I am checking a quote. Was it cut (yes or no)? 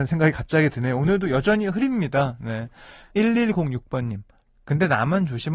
yes